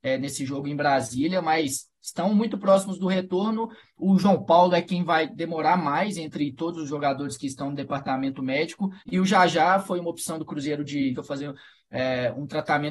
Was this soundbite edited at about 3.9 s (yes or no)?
no